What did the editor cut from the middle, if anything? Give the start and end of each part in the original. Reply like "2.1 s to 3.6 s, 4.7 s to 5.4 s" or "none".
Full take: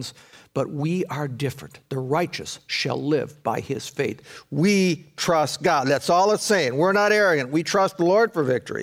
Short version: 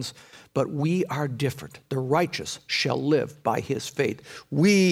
none